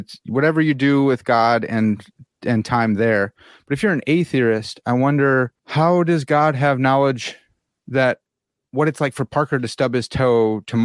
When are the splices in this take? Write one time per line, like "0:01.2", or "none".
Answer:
0:05.6